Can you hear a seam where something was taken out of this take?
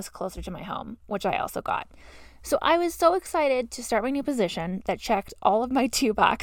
no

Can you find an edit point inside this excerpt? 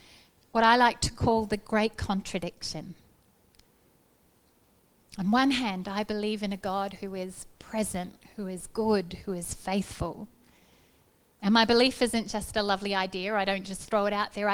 no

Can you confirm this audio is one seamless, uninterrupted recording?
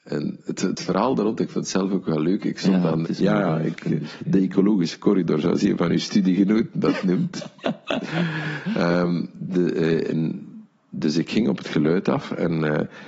no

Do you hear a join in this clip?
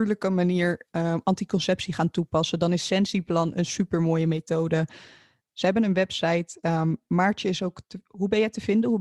no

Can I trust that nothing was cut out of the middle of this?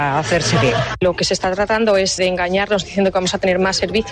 no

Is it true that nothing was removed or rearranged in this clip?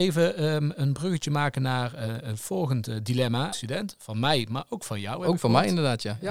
no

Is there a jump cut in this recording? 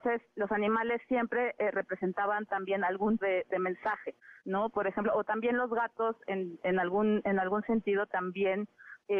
yes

